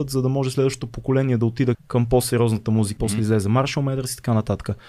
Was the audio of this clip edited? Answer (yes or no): yes